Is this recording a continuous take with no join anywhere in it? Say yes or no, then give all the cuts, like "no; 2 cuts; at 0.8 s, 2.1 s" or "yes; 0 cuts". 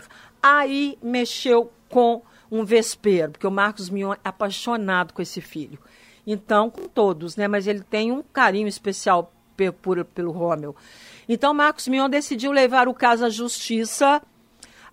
yes; 0 cuts